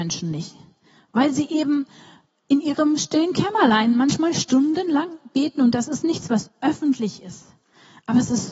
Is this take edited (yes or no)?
no